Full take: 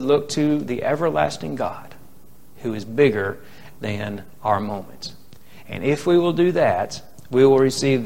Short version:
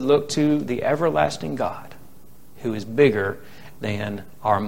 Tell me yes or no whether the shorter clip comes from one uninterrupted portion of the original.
yes